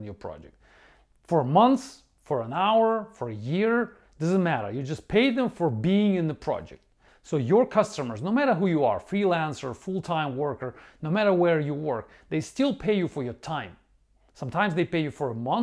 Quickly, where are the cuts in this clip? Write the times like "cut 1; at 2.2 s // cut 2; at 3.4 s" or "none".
cut 1; at 7.1 s